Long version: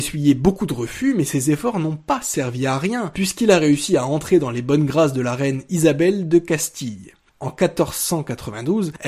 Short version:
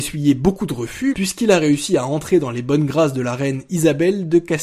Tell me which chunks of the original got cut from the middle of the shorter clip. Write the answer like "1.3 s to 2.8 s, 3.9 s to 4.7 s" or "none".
1.1 s to 3.1 s